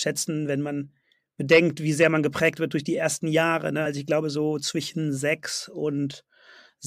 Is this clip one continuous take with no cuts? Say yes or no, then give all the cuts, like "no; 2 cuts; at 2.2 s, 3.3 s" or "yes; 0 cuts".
yes; 0 cuts